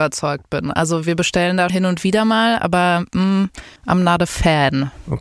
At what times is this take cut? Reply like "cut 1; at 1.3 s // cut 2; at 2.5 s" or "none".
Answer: cut 1; at 1.7 s // cut 2; at 3.8 s